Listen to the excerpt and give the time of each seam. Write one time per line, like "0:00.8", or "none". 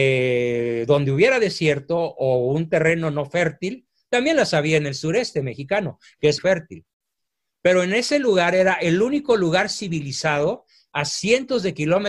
0:06.4